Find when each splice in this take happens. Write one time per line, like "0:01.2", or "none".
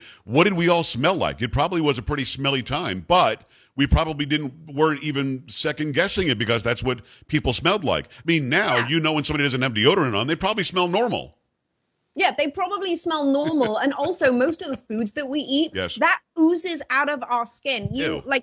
0:15.7